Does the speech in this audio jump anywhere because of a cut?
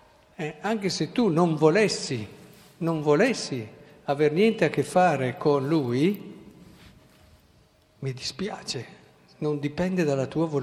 no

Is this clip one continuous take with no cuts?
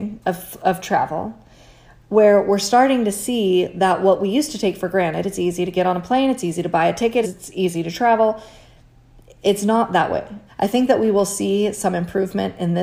no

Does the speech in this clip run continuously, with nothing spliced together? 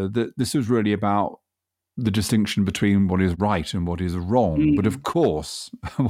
yes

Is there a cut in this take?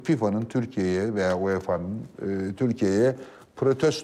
no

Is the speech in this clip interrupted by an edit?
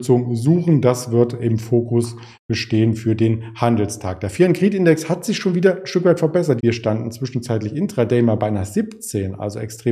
yes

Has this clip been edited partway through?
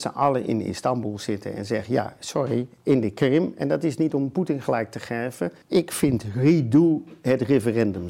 yes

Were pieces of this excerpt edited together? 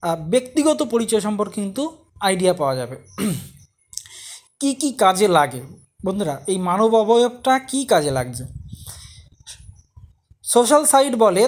no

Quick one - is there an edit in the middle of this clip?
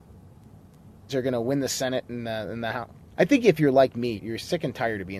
yes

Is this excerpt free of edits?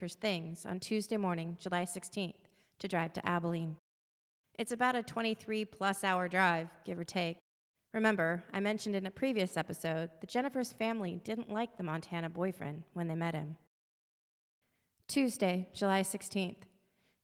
no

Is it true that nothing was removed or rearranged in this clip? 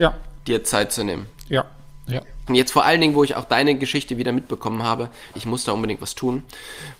no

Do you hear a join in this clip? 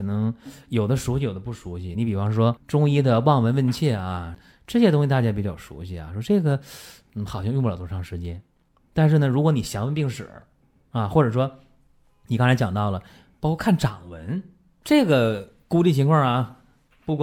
no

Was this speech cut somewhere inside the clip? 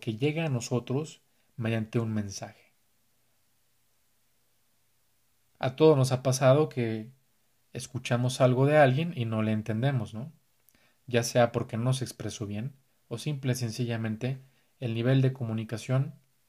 yes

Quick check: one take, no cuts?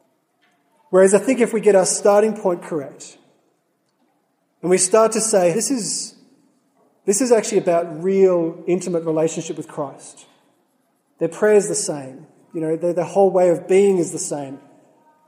no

